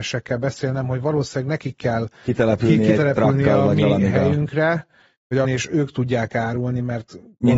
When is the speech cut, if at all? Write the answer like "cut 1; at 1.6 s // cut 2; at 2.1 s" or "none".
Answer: cut 1; at 5.4 s